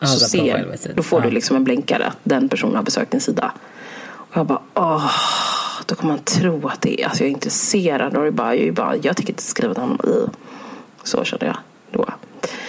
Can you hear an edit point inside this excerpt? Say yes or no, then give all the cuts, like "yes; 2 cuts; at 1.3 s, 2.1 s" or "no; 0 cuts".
no; 0 cuts